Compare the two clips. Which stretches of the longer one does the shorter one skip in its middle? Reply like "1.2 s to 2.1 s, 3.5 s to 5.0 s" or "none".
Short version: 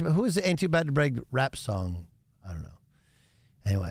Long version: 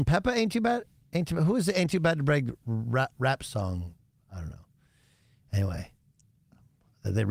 2.6 s to 3.1 s